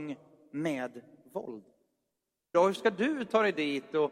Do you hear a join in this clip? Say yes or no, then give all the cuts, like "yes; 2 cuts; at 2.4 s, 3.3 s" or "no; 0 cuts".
yes; 1 cut; at 2.5 s